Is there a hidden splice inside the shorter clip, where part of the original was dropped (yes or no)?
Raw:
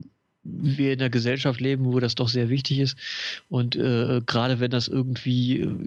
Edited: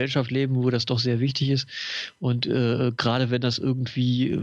no